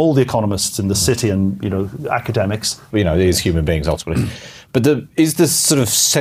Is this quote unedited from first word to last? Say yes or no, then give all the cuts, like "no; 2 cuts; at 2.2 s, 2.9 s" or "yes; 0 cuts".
no; 1 cut; at 2.9 s